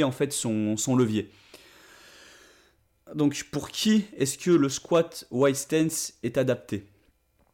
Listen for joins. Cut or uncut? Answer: cut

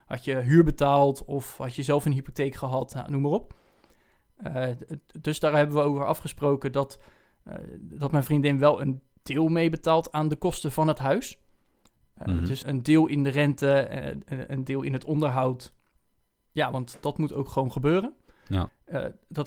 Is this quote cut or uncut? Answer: cut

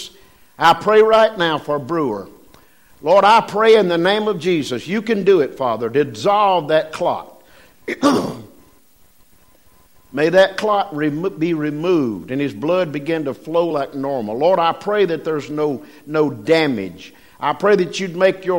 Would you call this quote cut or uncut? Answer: uncut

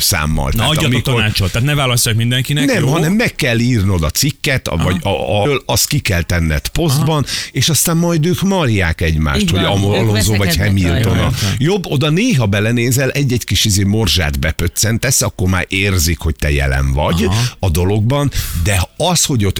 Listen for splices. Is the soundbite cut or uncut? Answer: cut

